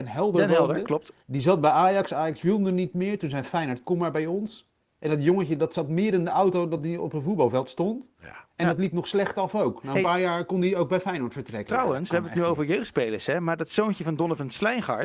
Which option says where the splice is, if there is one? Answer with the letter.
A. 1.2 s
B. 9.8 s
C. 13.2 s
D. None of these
A